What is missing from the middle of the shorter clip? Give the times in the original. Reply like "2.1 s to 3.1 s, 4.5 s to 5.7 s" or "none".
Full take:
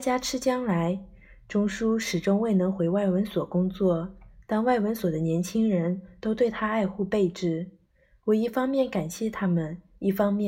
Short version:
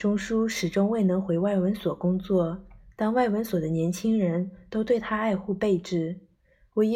none